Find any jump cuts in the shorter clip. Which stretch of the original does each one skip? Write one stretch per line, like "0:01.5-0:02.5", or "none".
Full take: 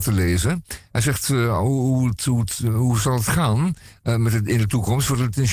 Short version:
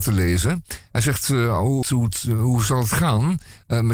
0:01.8-0:02.2